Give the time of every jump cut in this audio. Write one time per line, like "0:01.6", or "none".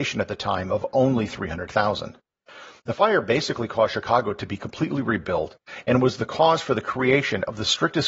none